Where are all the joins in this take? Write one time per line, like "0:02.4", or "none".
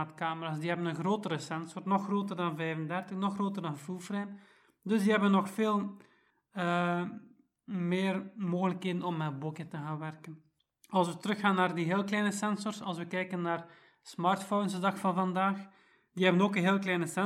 none